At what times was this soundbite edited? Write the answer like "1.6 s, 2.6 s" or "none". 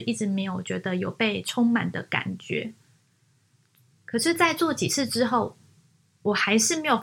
3.9 s